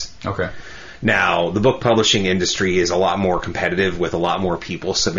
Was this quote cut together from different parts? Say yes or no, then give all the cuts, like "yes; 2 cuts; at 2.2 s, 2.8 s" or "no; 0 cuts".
no; 0 cuts